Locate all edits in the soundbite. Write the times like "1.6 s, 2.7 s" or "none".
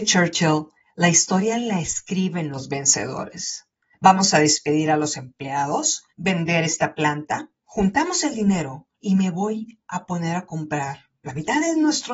3.9 s, 6.1 s, 8.9 s

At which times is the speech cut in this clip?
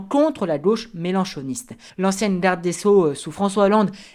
1.9 s

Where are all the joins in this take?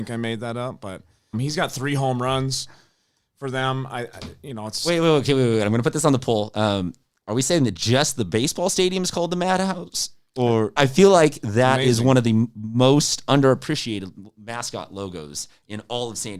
1.3 s, 10.8 s

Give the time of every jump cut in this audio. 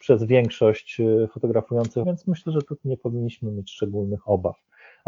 2.0 s

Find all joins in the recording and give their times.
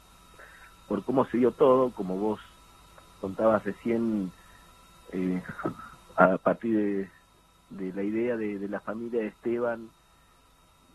none

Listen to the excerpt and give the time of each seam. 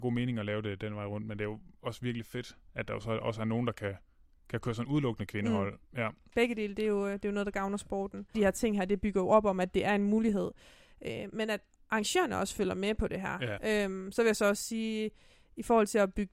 8.3 s, 13.6 s

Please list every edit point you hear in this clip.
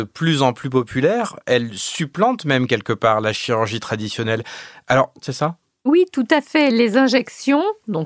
5.2 s

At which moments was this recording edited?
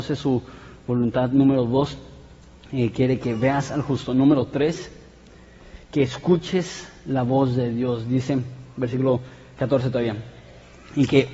9.6 s

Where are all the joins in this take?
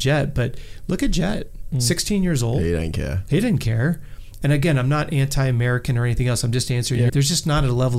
4.4 s, 7.1 s

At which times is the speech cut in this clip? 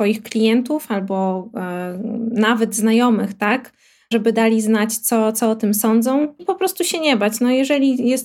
6.4 s

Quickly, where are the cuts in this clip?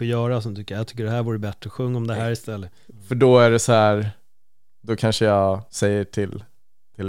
2.9 s, 5.7 s

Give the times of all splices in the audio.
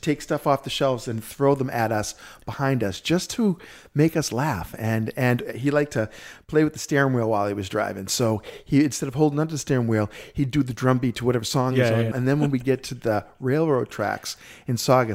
12.1 s

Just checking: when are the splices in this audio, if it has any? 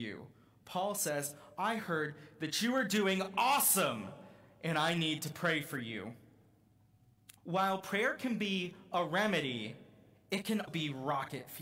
7.4 s, 10.7 s

